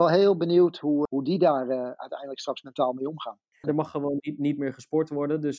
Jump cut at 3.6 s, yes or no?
yes